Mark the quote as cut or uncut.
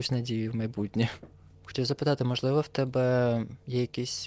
uncut